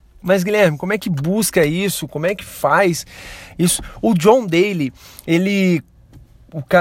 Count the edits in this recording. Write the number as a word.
zero